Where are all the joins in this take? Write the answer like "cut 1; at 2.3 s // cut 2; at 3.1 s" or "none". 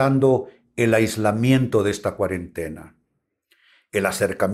none